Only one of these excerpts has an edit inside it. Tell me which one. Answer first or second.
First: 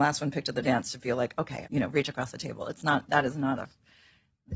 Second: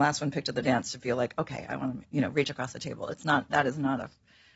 first